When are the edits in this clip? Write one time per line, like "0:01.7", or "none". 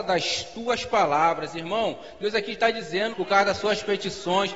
0:03.1